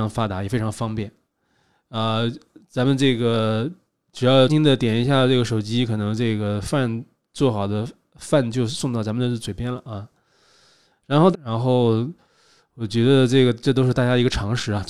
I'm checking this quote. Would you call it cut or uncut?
cut